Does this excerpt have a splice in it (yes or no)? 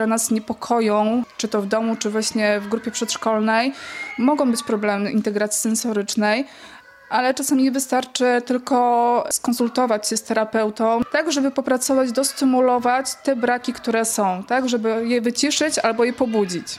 no